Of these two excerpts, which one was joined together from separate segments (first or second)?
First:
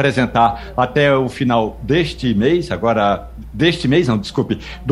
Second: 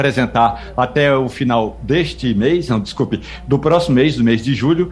second